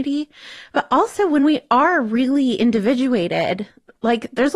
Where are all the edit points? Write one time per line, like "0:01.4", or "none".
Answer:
none